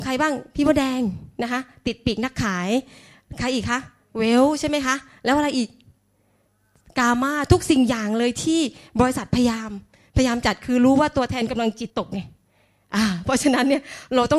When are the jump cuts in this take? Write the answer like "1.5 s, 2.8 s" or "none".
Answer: 11.9 s